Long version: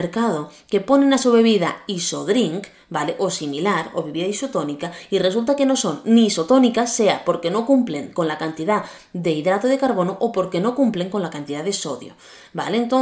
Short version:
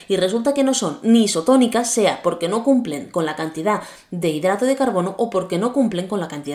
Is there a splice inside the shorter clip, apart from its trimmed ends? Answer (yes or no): no